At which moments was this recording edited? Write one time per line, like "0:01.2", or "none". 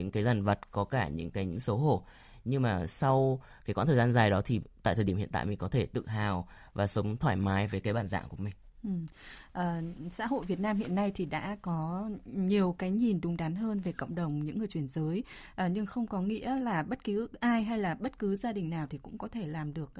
none

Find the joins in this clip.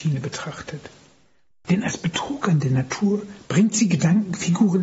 none

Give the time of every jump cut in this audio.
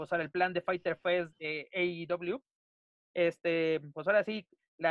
0:01.3
0:03.1

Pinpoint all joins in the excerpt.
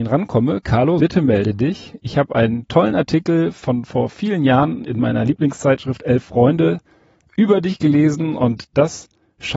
0:01.0

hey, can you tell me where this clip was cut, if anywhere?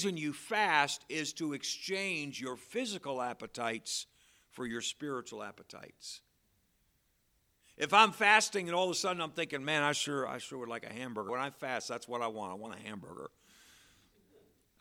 0:11.3

